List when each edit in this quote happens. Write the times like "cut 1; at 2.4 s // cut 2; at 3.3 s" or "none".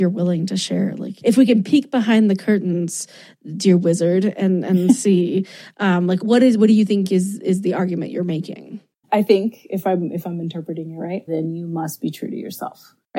cut 1; at 6.2 s // cut 2; at 9.0 s // cut 3; at 11.3 s